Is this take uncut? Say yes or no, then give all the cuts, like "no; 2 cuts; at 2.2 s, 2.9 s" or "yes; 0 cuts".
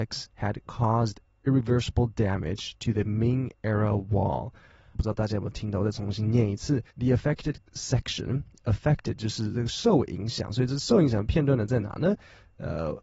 no; 2 cuts; at 4.9 s, 6.9 s